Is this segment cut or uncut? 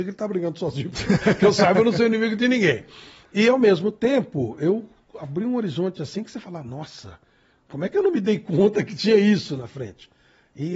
uncut